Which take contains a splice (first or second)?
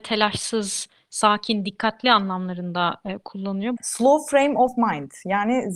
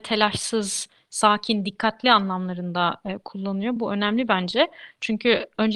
first